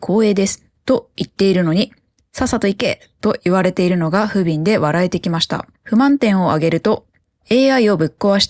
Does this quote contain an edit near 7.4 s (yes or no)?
no